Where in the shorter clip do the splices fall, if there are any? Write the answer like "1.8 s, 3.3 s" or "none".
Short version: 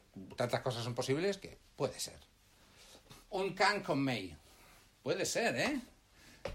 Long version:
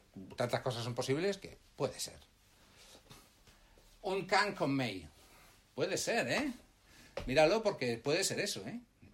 3.2 s